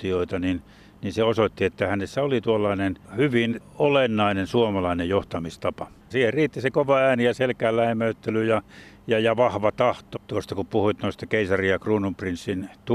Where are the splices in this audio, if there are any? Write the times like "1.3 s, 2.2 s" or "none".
3.0 s, 6.1 s, 10.2 s

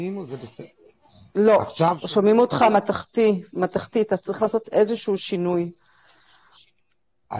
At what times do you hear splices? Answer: none

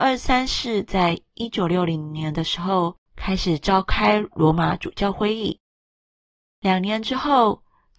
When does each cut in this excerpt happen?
3.0 s

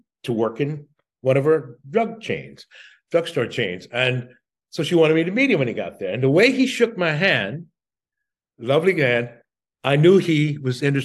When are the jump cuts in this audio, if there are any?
none

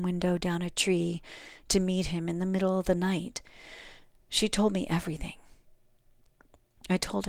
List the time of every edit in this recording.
none

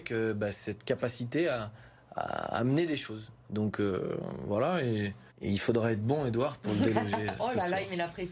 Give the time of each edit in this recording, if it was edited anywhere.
5.3 s, 6.6 s

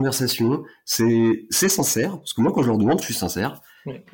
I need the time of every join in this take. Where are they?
3.0 s

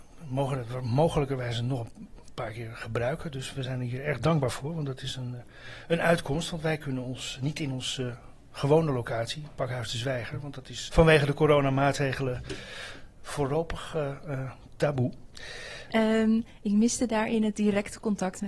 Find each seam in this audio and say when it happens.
10.9 s, 15.9 s

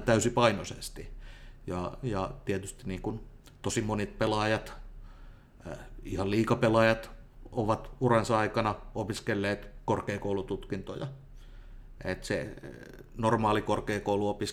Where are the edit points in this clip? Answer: 12.0 s

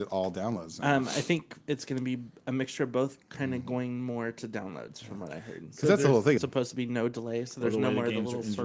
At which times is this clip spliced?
6.4 s

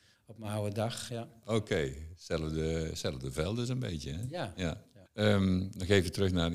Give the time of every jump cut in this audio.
1.1 s, 5.0 s

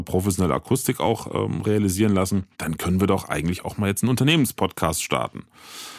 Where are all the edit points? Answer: 2.5 s

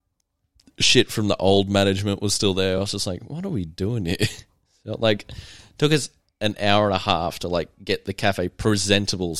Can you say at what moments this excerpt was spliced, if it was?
none

